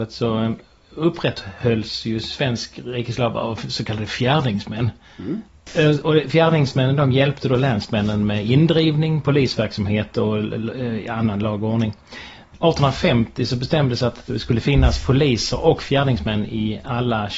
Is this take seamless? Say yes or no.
yes